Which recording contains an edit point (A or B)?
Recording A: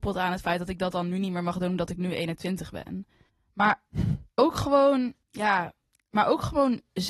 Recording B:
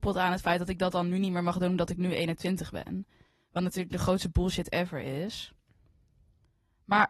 A